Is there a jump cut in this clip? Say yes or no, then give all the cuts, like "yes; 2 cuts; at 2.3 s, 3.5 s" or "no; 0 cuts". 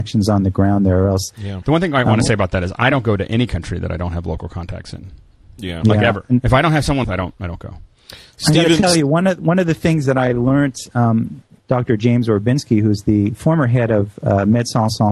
yes; 3 cuts; at 1.6 s, 7.0 s, 11.6 s